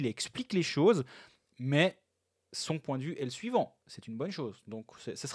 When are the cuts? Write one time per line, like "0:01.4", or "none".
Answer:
none